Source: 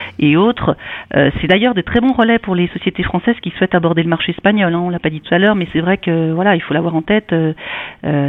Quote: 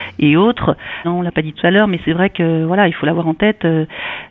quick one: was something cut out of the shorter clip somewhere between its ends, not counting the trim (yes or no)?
yes